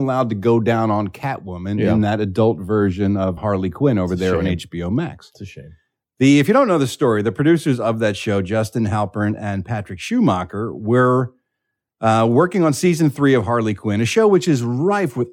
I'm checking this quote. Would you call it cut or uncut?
cut